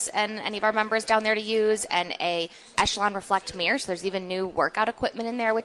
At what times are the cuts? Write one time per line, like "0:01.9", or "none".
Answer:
none

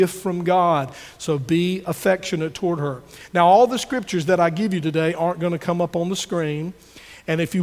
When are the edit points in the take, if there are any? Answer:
none

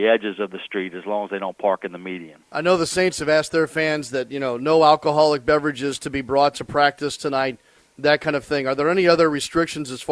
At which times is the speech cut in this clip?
0:02.4

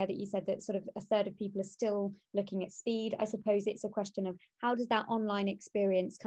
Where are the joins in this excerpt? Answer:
none

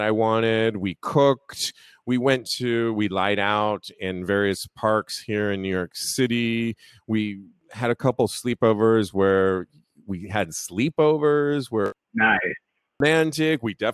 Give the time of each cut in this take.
none

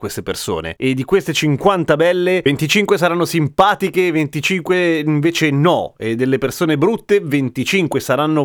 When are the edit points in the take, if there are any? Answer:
none

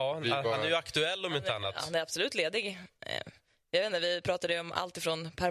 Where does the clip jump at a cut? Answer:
none

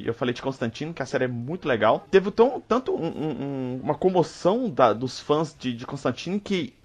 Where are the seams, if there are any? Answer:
0:03.0

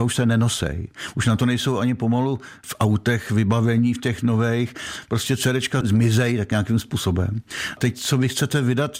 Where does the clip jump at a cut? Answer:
none

